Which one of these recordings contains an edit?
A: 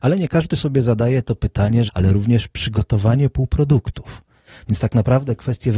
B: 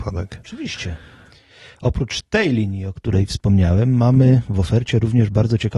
A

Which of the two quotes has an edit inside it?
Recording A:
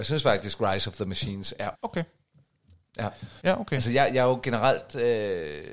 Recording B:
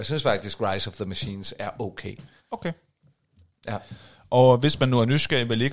A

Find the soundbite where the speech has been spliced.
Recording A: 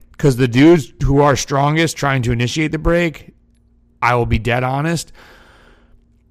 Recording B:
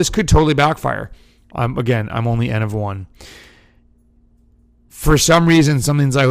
B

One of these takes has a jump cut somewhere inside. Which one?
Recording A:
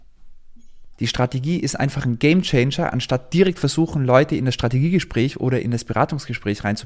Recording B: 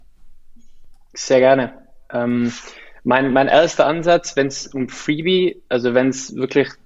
A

